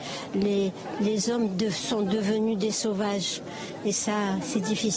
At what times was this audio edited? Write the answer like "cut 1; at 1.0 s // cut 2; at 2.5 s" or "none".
none